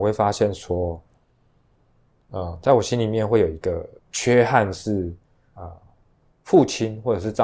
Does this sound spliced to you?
yes; 2 cuts; at 4.0 s, 5.6 s

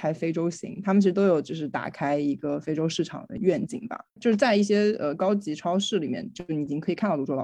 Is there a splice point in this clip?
no; 0 cuts

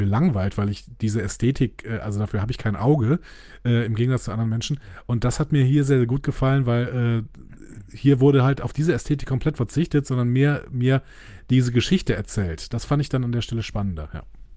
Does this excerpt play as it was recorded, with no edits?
yes; 0 cuts

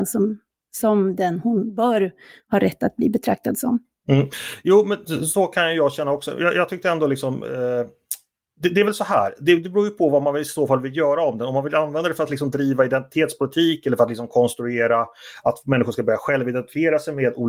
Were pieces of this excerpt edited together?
no; 0 cuts

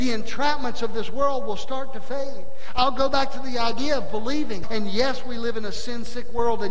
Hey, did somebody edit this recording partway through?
yes; 1 cut; at 4.6 s

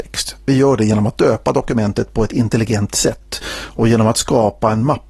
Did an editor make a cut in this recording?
no; 0 cuts

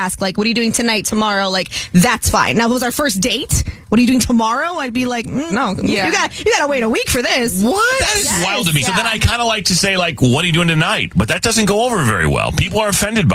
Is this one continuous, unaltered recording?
no; 2 cuts; at 5.5 s, 8.8 s

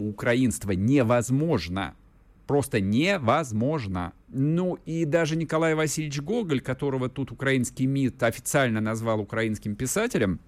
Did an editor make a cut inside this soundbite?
yes; 1 cut; at 4.2 s

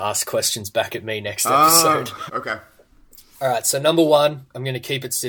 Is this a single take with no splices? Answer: no; 1 cut; at 2.3 s

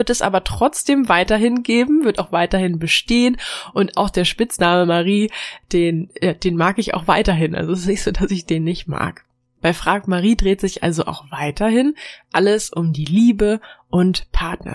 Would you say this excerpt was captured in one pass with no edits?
yes; 0 cuts

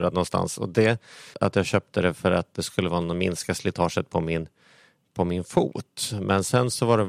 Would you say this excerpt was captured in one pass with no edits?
no; 1 cut; at 1.3 s

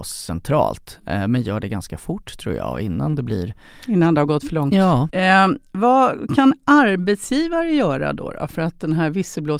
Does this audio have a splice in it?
yes; 1 cut; at 5.1 s

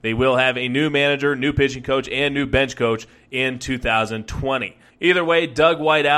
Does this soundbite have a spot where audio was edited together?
yes; 1 cut; at 4.9 s

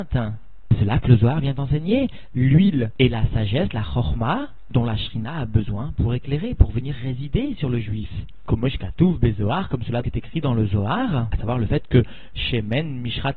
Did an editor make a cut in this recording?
yes; 1 cut; at 10.0 s

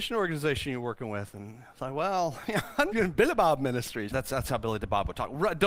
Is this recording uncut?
no; 2 cuts; at 2.9 s, 4.1 s

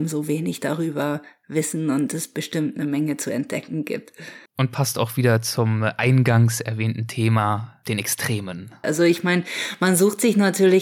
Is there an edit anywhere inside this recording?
yes; 2 cuts; at 4.5 s, 8.8 s

